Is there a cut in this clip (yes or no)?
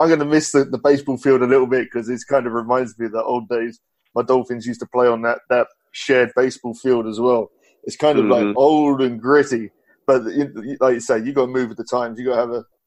no